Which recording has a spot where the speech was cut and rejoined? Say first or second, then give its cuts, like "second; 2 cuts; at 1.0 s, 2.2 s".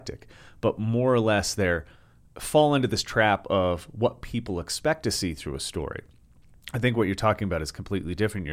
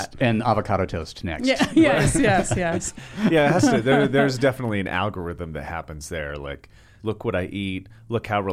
second; 1 cut; at 7.0 s